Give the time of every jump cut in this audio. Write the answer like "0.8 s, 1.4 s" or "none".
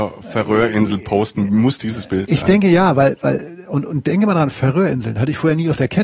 none